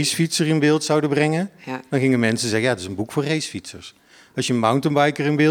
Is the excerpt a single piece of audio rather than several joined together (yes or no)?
yes